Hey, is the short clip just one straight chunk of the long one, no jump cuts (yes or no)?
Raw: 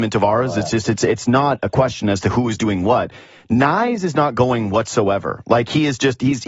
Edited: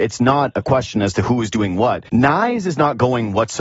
no